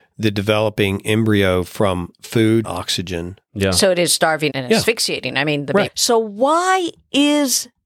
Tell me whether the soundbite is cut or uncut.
cut